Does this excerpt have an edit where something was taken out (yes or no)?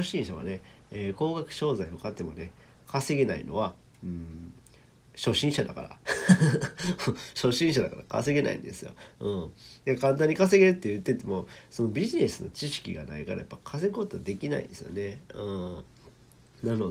no